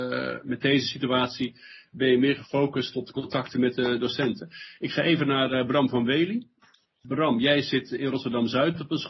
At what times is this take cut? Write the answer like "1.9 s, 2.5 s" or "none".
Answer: none